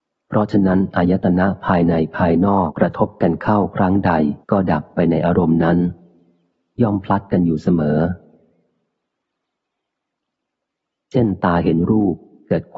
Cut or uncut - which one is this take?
cut